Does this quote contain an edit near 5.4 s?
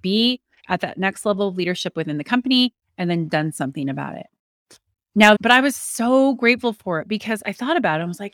yes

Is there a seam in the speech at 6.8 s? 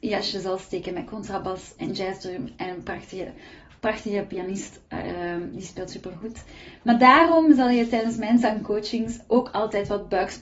no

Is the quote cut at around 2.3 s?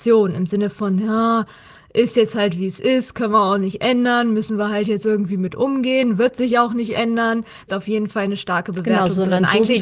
no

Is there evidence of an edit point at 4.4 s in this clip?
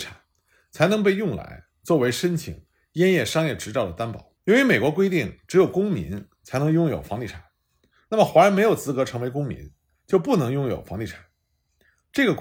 yes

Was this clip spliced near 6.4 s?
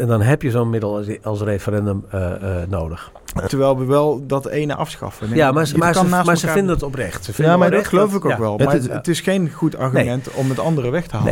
no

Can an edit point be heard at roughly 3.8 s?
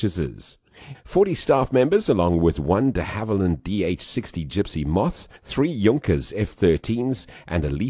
no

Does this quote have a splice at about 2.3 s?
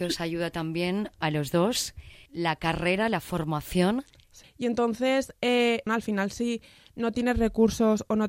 yes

